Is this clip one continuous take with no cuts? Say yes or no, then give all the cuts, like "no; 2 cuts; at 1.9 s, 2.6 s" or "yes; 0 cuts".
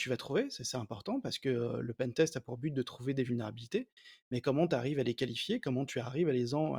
yes; 0 cuts